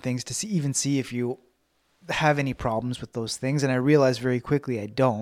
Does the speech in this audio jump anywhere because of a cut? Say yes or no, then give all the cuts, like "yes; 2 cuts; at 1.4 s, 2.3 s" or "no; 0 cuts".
no; 0 cuts